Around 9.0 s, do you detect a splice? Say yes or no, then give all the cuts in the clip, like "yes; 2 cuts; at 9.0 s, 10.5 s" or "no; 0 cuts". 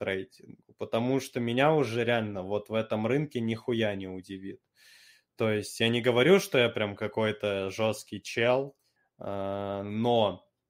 yes; 1 cut; at 9.0 s